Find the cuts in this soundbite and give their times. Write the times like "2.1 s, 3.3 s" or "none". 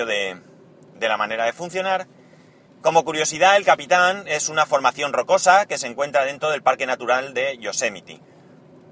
2.7 s